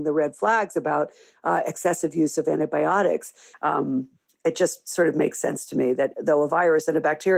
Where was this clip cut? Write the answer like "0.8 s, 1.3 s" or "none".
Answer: 3.5 s, 6.1 s